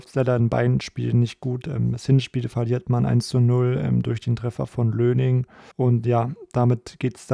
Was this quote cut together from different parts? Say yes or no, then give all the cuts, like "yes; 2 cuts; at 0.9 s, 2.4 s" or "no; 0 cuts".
yes; 1 cut; at 5.7 s